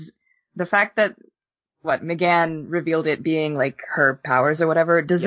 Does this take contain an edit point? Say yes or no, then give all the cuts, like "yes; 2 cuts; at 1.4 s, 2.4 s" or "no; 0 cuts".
no; 0 cuts